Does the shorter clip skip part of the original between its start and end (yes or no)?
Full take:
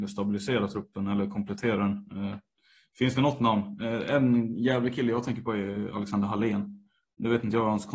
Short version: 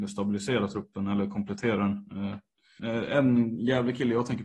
yes